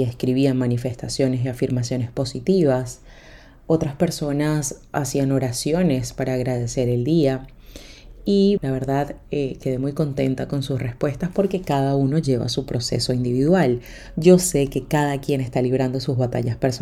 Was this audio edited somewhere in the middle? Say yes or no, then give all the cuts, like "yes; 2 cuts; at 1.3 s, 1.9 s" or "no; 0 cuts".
yes; 1 cut; at 8.6 s